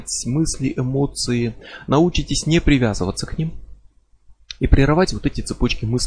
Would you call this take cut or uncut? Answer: uncut